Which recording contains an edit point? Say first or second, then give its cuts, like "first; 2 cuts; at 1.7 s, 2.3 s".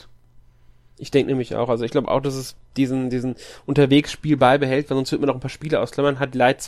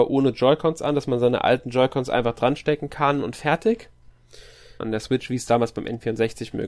second; 1 cut; at 4.8 s